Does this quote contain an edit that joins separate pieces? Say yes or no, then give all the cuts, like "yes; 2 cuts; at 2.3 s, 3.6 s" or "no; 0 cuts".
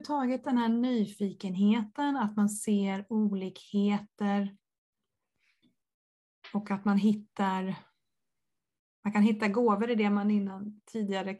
no; 0 cuts